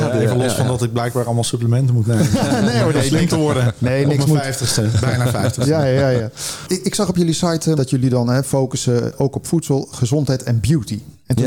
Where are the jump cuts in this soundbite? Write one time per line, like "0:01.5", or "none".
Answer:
0:07.8

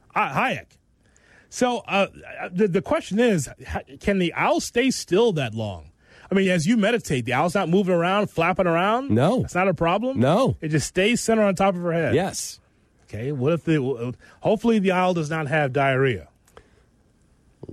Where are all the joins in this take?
none

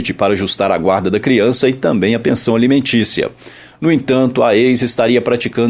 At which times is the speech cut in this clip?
none

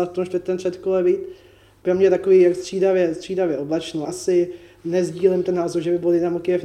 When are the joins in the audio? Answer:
0:01.8
0:04.1

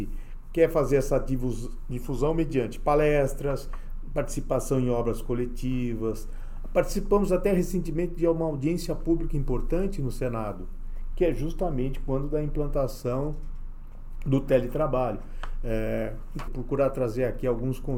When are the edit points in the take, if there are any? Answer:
0:16.5

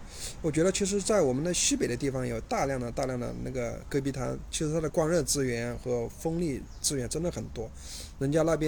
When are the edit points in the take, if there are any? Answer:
0:04.9

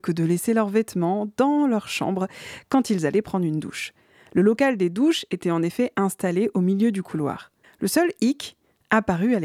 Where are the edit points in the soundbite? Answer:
0:07.6

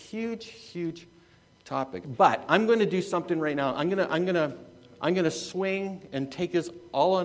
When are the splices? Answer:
0:02.0

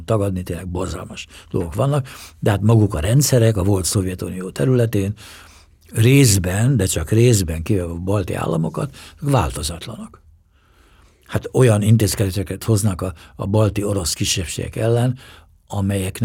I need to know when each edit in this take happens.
none

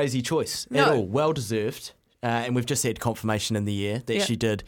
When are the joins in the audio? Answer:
none

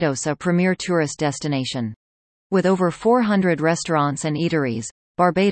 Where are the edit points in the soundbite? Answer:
0:02.3

